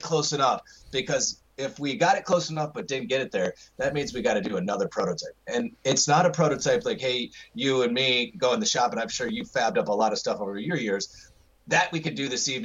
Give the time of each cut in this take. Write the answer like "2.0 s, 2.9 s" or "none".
none